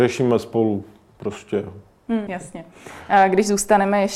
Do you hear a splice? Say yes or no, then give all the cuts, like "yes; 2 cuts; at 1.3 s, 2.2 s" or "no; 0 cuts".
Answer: yes; 1 cut; at 2.3 s